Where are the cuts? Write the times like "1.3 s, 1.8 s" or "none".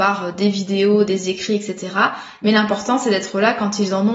none